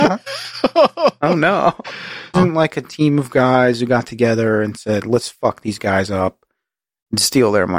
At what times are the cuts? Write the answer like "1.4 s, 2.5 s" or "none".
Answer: 2.3 s